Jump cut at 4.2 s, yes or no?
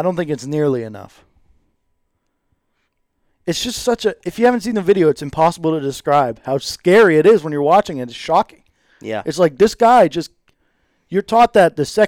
no